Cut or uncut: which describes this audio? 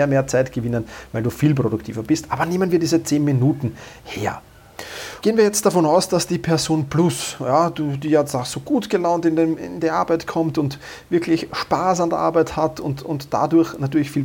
cut